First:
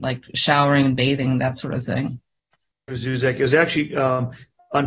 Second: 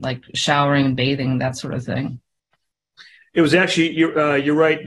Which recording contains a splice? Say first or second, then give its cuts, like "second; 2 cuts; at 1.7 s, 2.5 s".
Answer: first; 1 cut; at 2.9 s